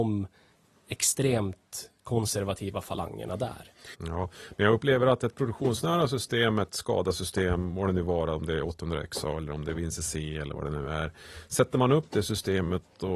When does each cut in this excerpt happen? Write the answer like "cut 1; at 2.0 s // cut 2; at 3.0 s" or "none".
cut 1; at 3.9 s